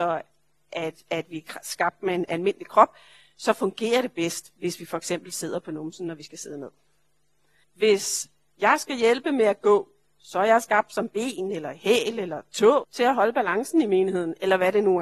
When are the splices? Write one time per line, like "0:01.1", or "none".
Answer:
0:07.6
0:12.8